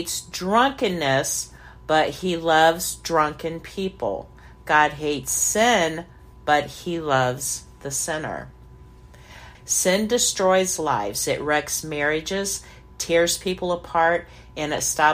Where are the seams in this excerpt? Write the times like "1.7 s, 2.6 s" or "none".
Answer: 9.5 s